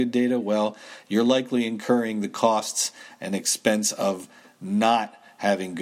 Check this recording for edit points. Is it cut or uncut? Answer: uncut